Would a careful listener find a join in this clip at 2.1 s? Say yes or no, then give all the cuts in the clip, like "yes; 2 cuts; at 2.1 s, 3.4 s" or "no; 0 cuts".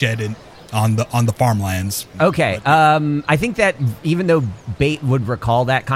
yes; 1 cut; at 2.1 s